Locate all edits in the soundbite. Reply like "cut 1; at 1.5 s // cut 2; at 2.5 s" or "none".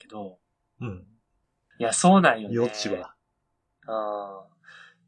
cut 1; at 1.7 s